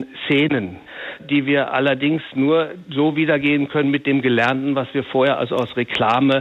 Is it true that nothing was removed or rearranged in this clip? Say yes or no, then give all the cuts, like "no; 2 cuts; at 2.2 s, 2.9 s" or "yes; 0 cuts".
yes; 0 cuts